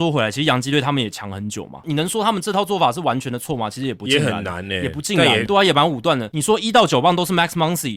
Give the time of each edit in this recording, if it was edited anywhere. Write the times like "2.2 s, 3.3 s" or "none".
5.5 s